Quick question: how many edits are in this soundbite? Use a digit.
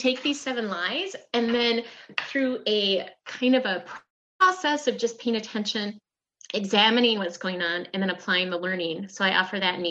0